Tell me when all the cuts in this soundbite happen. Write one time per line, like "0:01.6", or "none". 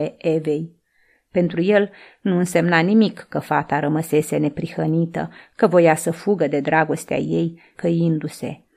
0:07.7